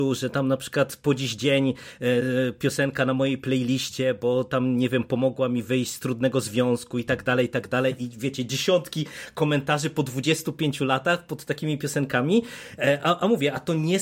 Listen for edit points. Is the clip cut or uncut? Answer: uncut